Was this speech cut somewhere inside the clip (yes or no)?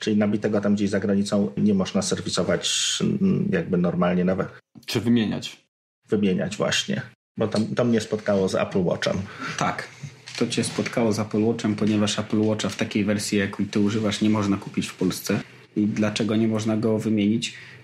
yes